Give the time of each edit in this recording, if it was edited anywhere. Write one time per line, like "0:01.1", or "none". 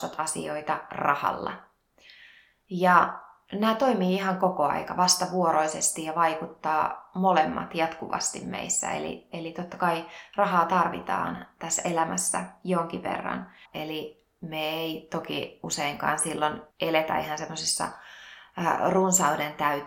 0:13.6
0:16.7